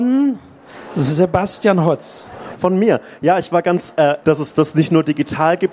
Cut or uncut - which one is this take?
cut